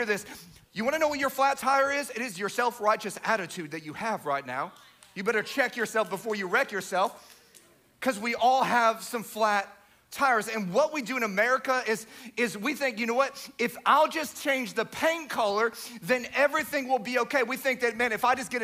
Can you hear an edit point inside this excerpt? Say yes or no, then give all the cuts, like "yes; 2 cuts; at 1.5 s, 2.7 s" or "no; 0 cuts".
no; 0 cuts